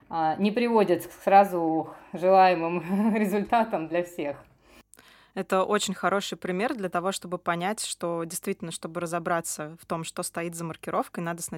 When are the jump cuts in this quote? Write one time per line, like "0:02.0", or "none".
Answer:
none

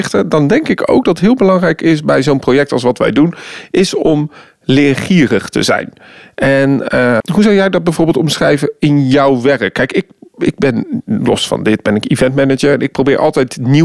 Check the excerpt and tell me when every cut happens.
0:07.2

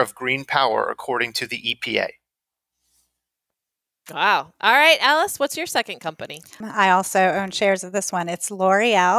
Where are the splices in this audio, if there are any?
0:06.6

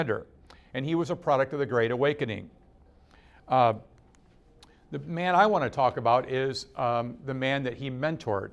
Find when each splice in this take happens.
none

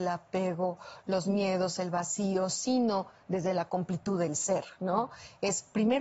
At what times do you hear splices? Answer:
none

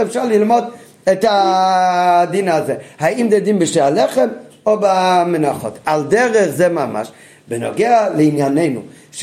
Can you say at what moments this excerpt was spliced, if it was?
none

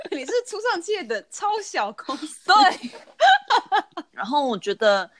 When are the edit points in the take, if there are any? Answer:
0:04.1

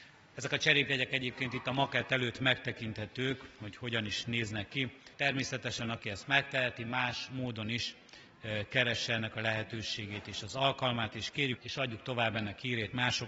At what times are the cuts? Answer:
0:05.1
0:11.6

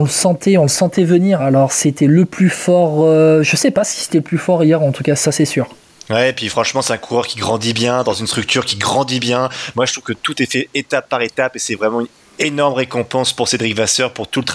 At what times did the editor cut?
0:01.4
0:05.2

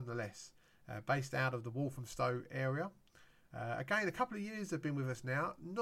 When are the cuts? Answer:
none

